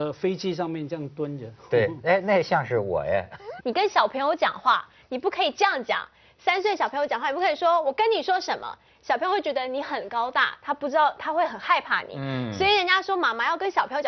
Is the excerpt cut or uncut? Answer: cut